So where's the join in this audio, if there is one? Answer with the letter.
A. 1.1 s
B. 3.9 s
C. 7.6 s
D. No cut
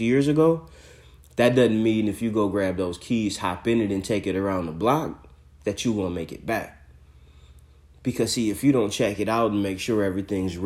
D